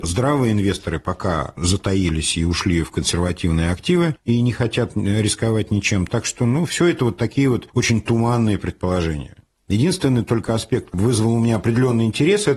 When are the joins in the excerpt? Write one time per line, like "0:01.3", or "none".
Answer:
0:06.1